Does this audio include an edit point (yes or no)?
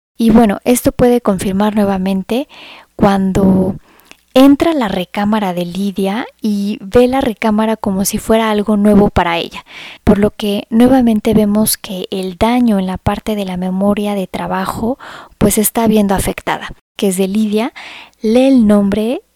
yes